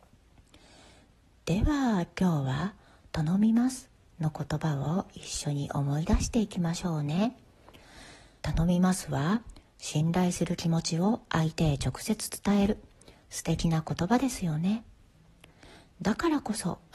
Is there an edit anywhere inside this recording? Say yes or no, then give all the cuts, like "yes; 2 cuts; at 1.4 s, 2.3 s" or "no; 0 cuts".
yes; 1 cut; at 8.4 s